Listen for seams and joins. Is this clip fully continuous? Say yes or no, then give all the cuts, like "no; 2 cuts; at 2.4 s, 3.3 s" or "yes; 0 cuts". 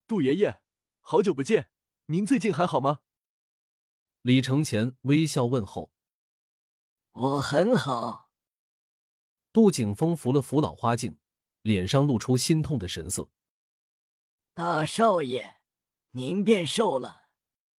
no; 2 cuts; at 11.6 s, 15.9 s